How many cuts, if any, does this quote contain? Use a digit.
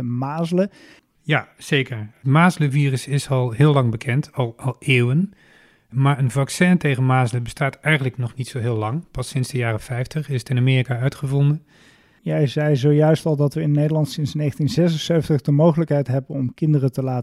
2